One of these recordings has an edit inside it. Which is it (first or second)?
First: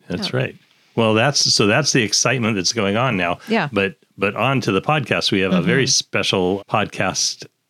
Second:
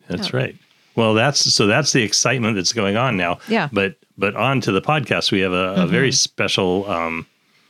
first